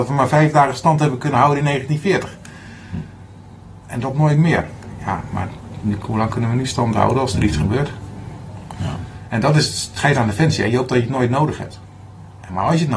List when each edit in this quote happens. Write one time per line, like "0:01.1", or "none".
0:08.7